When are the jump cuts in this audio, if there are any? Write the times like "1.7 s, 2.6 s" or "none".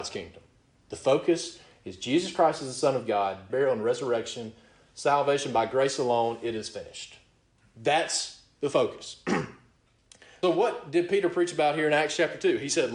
3.5 s, 10.4 s

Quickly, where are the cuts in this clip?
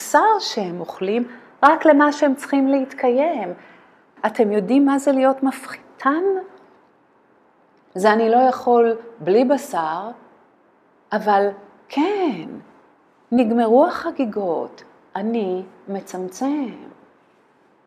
4.2 s

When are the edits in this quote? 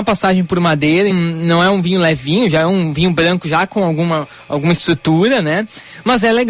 1.1 s

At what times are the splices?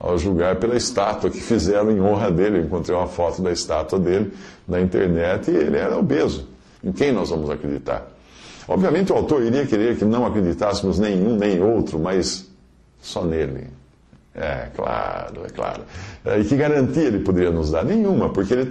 6.8 s

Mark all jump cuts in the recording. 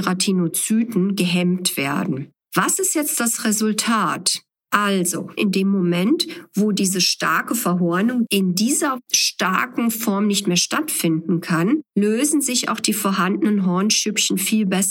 5.4 s, 8.3 s

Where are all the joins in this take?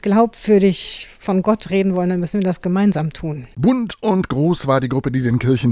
3.5 s

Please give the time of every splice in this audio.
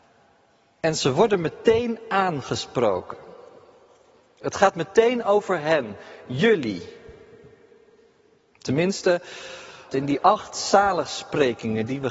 9.9 s

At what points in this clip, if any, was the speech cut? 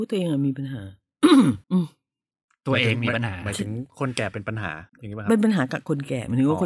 1.6 s, 4.9 s

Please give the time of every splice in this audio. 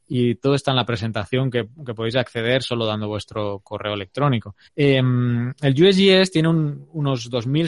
4.6 s

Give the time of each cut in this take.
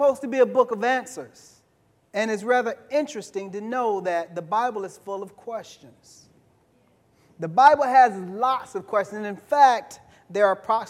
2.0 s

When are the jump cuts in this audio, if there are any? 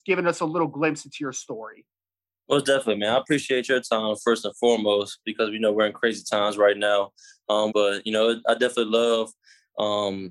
7.7 s

